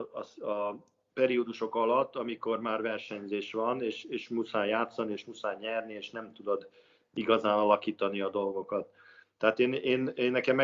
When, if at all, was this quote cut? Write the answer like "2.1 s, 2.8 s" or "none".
none